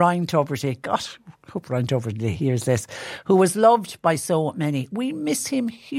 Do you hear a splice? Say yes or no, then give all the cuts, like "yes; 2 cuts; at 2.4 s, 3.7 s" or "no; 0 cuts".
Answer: no; 0 cuts